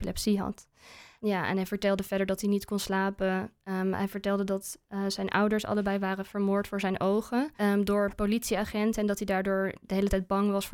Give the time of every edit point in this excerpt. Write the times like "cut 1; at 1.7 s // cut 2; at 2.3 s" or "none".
none